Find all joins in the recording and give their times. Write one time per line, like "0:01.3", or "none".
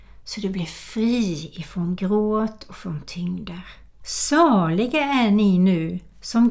0:04.0